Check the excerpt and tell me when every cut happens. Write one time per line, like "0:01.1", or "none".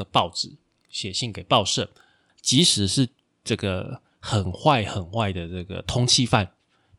0:02.3

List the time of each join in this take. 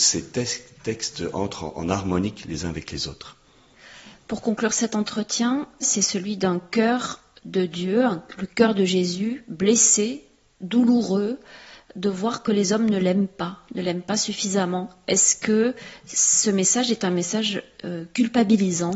0:05.8

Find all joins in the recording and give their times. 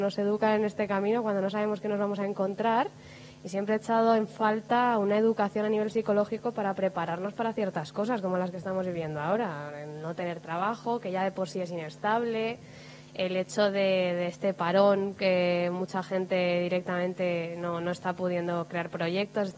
none

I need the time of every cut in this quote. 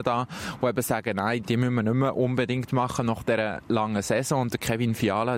0:01.4

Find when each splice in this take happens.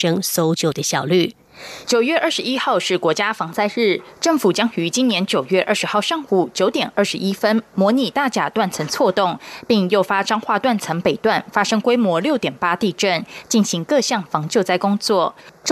0:01.8

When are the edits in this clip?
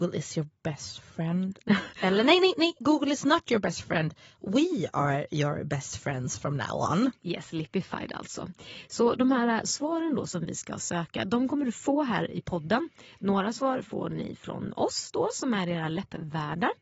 none

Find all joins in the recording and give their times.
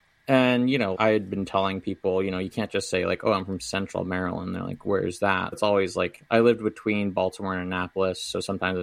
0:00.9
0:05.5

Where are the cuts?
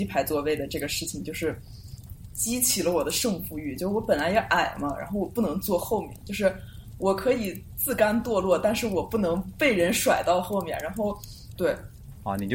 0:11.6

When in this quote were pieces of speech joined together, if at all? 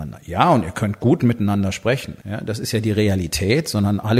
0:02.2

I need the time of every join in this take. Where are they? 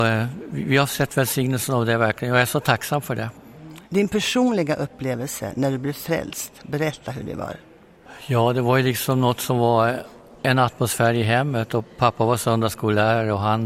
0:03.9

